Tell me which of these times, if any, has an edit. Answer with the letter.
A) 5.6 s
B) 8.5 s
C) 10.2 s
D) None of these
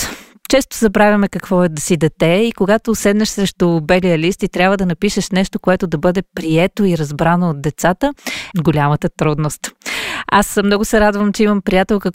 B